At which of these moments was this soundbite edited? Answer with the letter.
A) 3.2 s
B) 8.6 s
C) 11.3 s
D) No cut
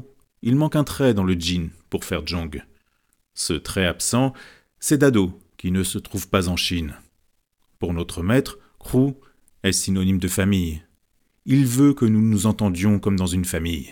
D